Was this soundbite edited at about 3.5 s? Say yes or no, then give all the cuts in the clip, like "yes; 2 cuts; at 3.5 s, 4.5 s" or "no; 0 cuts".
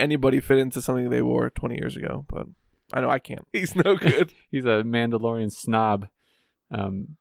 yes; 1 cut; at 3.5 s